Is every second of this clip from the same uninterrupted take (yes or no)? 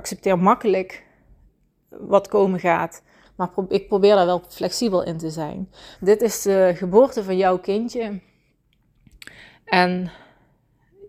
no